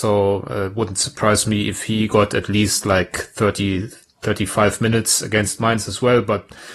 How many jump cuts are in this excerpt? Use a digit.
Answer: 0